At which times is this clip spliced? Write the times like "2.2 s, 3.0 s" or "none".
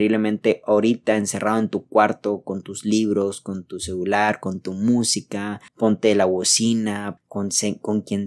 5.7 s, 7.2 s